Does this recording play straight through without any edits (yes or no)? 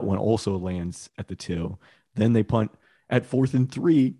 yes